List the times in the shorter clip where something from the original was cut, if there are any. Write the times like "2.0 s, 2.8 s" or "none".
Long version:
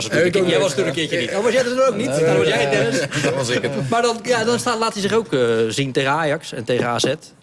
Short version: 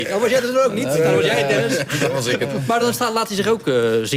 2.8 s